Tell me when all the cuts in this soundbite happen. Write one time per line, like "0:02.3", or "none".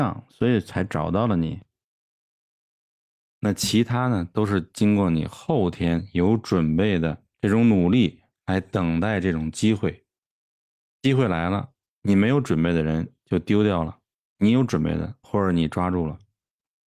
0:03.3
0:15.2